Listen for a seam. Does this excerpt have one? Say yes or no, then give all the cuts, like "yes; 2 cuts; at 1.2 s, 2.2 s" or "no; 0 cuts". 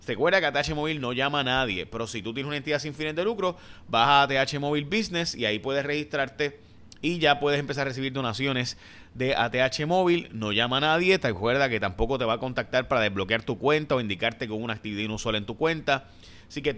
no; 0 cuts